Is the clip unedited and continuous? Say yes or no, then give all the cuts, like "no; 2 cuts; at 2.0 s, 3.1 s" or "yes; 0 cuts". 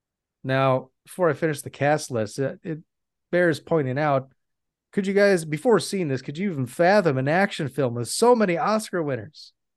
no; 1 cut; at 1.0 s